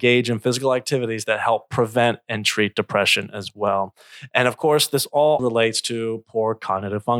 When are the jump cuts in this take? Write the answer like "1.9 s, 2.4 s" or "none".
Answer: 5.4 s